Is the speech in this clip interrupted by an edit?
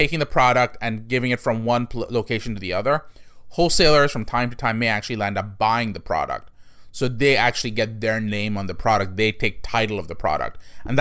no; 0 cuts

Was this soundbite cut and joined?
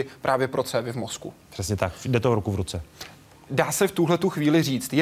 no; 0 cuts

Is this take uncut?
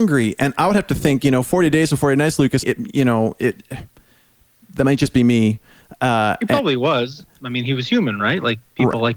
no; 1 cut; at 2.6 s

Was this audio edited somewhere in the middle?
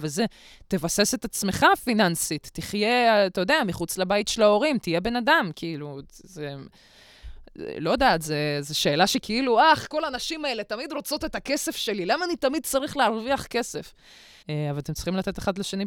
yes; 1 cut; at 14.4 s

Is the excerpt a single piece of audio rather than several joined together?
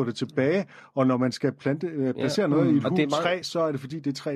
yes; 0 cuts

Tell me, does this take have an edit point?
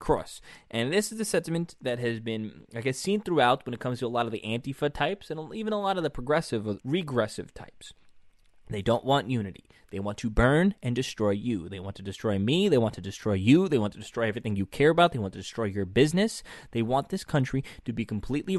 yes; 1 cut; at 6.8 s

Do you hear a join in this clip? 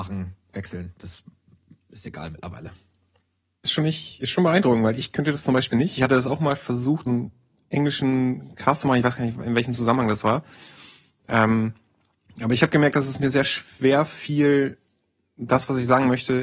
yes; 1 cut; at 7.1 s

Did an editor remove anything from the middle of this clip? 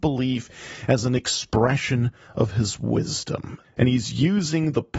yes; 1 cut; at 3.6 s

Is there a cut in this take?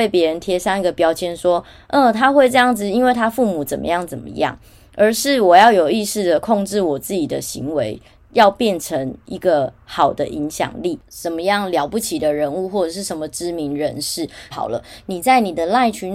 yes; 2 cuts; at 11.0 s, 14.5 s

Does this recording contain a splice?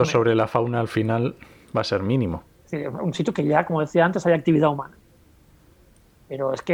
yes; 1 cut; at 2.5 s

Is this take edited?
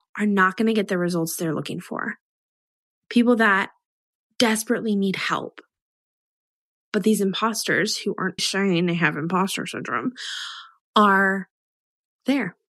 yes; 1 cut; at 8.4 s

